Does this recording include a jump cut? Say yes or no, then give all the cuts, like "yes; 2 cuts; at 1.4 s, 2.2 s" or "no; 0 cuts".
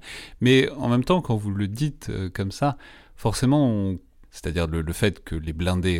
yes; 1 cut; at 4.2 s